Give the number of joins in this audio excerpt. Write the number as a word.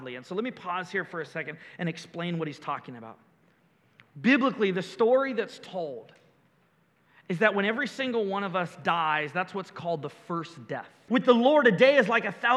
one